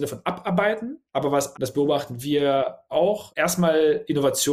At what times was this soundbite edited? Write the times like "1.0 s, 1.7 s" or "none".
1.5 s, 3.3 s